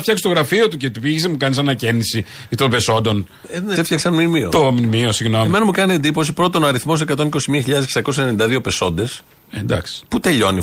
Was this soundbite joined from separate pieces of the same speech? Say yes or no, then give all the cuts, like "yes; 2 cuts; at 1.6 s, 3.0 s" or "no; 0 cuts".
yes; 1 cut; at 3.8 s